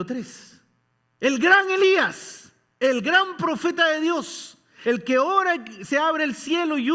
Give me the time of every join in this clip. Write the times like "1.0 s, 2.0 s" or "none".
4.8 s